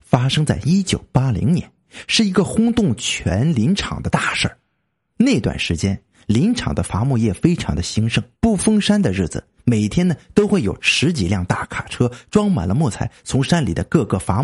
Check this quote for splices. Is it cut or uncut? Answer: cut